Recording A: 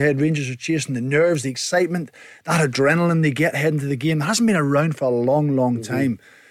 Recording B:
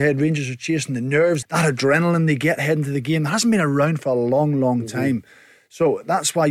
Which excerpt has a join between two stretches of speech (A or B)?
B